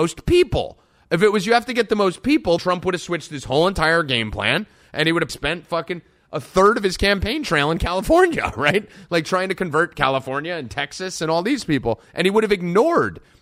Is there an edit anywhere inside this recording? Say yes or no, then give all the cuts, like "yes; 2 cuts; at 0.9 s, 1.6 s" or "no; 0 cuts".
yes; 2 cuts; at 2.6 s, 5.3 s